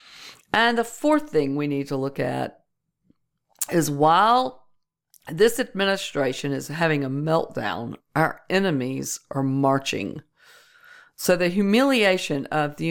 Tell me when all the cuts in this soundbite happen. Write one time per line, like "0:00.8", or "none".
none